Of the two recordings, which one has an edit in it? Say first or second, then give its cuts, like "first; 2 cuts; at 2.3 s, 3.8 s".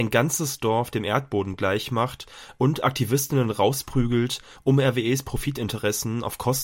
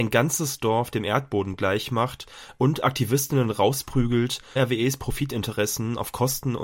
second; 1 cut; at 4.6 s